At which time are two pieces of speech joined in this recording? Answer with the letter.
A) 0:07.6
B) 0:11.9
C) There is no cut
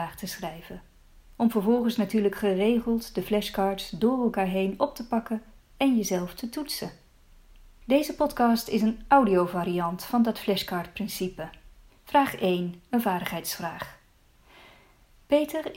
B